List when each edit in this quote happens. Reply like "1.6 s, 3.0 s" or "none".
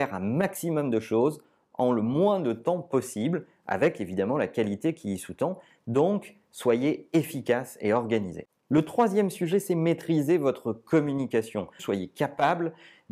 11.8 s